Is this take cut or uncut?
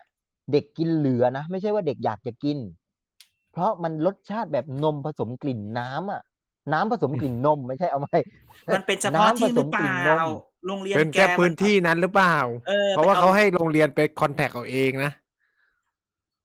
uncut